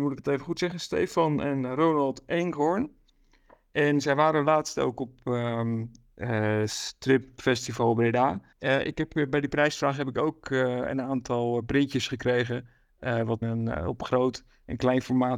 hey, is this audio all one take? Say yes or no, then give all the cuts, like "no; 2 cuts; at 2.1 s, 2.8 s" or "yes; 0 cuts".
no; 2 cuts; at 8.5 s, 13.4 s